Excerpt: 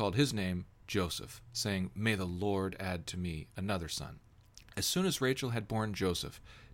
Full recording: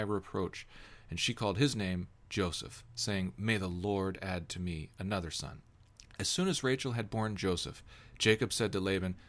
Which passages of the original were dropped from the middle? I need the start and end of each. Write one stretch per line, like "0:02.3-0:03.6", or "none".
none